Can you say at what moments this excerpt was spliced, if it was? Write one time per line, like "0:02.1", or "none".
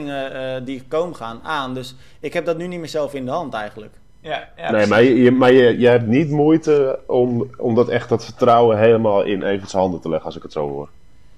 none